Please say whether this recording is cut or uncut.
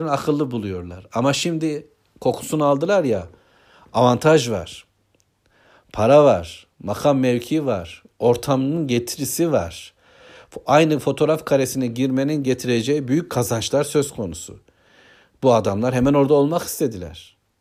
uncut